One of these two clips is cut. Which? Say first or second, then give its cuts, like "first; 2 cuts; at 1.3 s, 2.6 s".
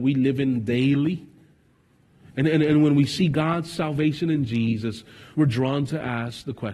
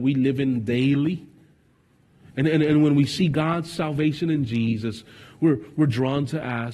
first; 1 cut; at 5.3 s